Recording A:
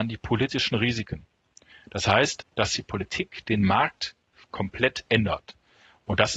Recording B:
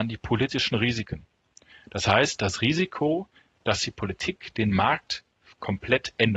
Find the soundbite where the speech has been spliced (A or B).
A